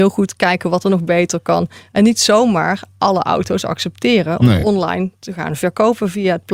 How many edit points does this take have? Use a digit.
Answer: 0